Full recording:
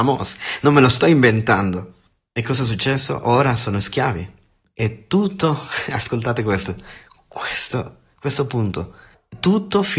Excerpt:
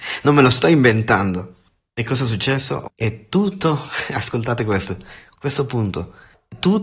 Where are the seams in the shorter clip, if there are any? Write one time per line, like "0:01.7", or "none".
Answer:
0:02.8
0:05.3